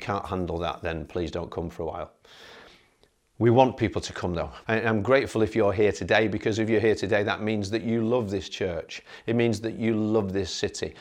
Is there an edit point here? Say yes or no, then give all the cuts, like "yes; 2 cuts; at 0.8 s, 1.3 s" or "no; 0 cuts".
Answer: yes; 1 cut; at 4.6 s